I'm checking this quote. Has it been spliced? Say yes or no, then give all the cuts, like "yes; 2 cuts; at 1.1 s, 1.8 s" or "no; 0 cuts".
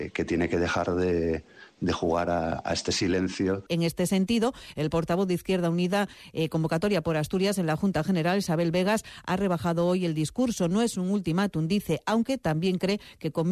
yes; 1 cut; at 3.7 s